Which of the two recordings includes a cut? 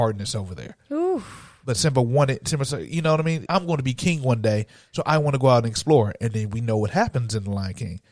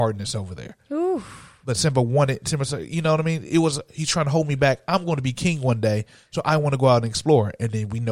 first; 1 cut; at 3.5 s

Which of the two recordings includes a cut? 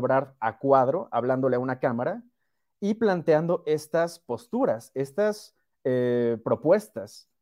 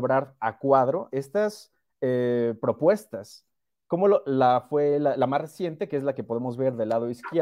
second; 1 cut; at 1.1 s

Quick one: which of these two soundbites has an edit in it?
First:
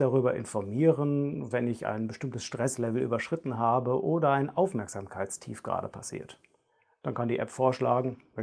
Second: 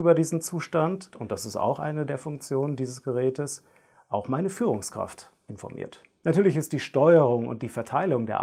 second; 1 cut; at 1.1 s

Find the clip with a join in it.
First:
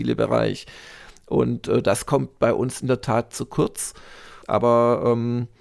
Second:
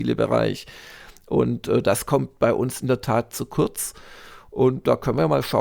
first; 1 cut; at 4.4 s

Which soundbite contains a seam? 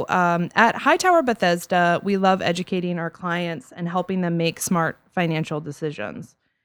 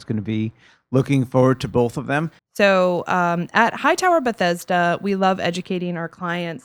second; 1 cut; at 2.4 s

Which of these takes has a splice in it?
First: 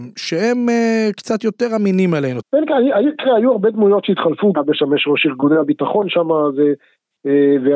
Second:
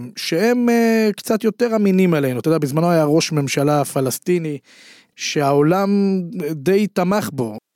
first; 2 cuts; at 2.4 s, 4.5 s

